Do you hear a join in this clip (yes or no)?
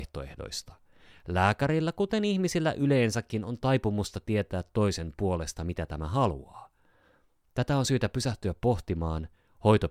no